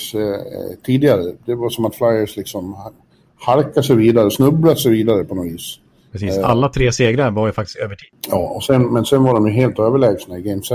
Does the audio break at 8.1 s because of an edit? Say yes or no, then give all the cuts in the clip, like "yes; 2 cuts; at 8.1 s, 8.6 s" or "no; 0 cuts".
no; 0 cuts